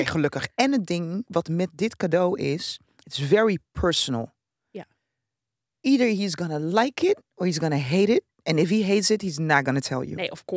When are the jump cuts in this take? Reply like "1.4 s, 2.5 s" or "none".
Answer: none